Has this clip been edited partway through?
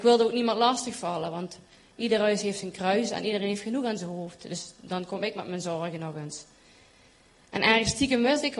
no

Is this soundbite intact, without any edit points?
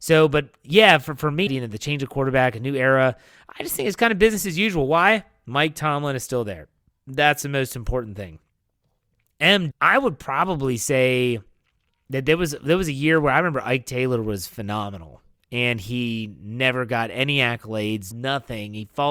no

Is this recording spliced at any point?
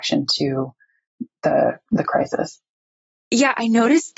no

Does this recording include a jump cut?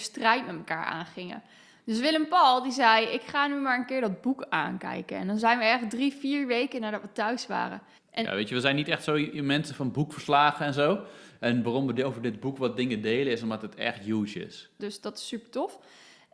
yes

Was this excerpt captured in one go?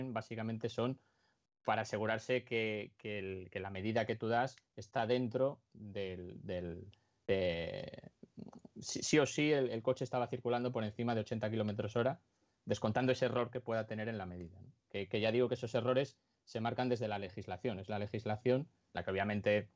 yes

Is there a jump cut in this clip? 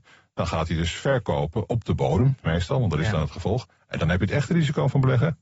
no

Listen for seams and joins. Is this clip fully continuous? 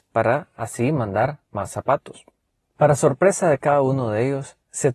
yes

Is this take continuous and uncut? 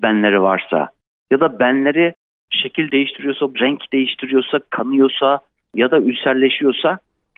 no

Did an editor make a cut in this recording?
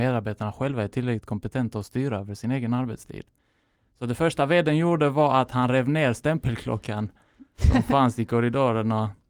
no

